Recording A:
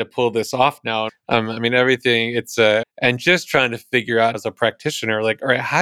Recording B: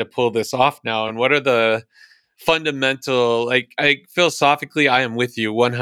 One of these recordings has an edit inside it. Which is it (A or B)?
A